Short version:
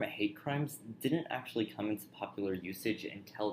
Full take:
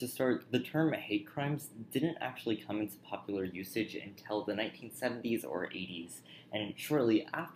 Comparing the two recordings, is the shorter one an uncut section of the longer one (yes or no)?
yes